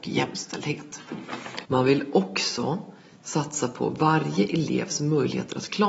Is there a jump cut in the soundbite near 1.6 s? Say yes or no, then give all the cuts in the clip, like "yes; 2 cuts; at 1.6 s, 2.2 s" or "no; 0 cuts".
yes; 1 cut; at 1.6 s